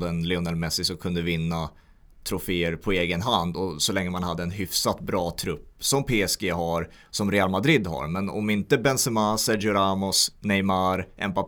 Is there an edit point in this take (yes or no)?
no